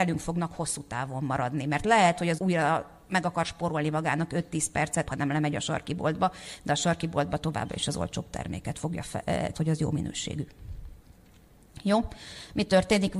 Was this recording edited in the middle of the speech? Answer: yes; 3 cuts; at 2.4 s, 5.1 s, 9.5 s

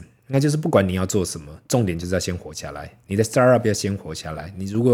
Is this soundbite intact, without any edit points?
yes; 0 cuts

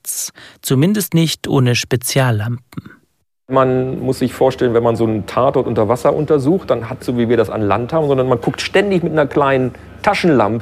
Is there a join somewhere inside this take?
yes; 1 cut; at 7.0 s

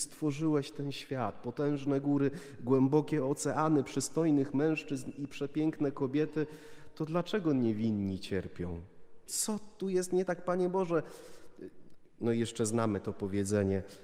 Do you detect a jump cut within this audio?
yes; 1 cut; at 9.3 s

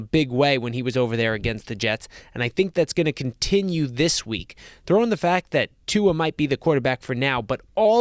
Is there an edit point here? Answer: no; 0 cuts

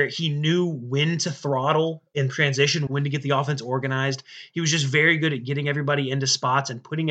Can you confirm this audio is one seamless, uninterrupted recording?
no; 1 cut; at 2.9 s

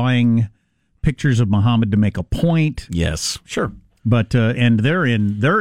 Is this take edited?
yes; 2 cuts; at 3.4 s, 4.5 s

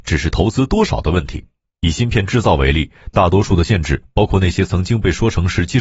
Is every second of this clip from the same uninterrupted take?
yes; 0 cuts

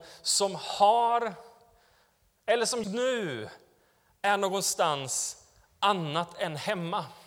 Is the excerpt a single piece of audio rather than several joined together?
no; 1 cut; at 2.8 s

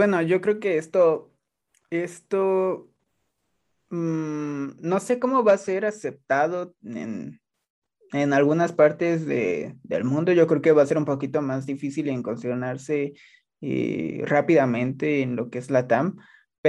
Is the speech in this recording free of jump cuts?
yes; 0 cuts

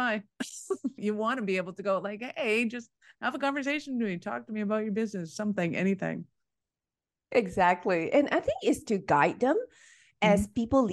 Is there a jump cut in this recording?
yes; 1 cut; at 1.0 s

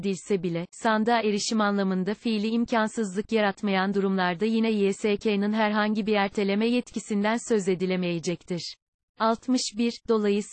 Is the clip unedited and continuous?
no; 1 cut; at 9.0 s

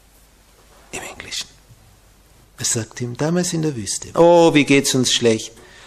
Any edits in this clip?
yes; 2 cuts; at 2.4 s, 4.1 s

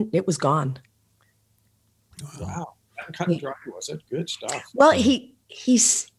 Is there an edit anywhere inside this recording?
no; 0 cuts

